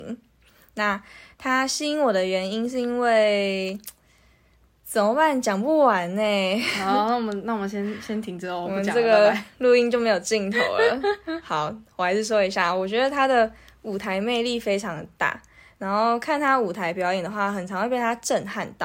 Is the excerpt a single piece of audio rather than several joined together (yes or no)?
yes